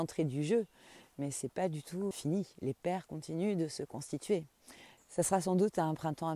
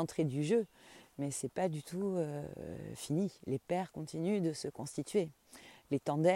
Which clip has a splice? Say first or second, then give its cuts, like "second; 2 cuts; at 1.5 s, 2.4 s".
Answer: first; 2 cuts; at 2.1 s, 5.0 s